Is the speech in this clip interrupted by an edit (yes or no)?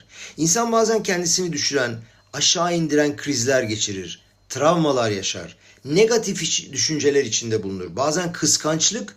no